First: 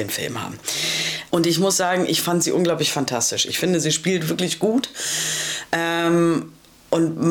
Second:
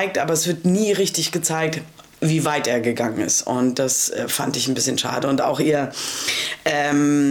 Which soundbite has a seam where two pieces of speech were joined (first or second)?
first